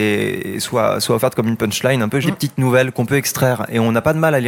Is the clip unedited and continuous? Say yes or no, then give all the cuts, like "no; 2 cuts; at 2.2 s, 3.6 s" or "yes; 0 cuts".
no; 1 cut; at 2.2 s